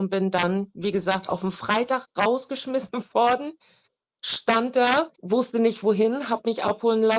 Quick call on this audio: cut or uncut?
cut